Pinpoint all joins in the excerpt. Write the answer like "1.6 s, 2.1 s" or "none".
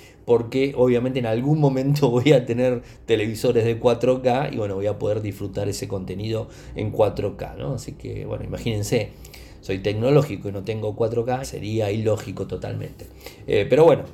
11.4 s